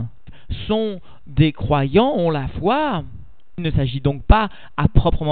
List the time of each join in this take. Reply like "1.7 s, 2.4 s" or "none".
3.5 s